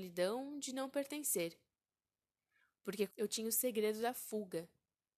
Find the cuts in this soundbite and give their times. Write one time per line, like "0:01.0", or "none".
0:03.1